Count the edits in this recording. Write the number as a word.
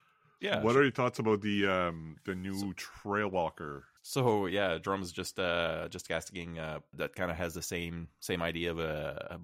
two